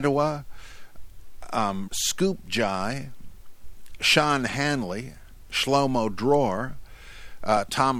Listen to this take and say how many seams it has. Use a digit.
1